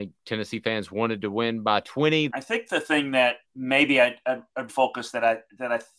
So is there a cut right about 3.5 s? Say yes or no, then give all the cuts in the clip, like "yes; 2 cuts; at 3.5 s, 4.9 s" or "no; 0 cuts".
yes; 3 cuts; at 2.3 s, 3.5 s, 4.7 s